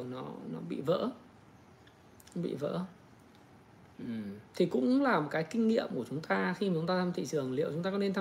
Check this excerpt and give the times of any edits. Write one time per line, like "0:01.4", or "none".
0:04.5